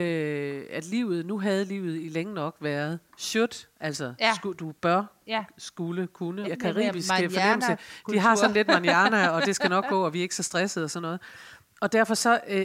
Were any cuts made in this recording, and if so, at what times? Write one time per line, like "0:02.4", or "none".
0:06.4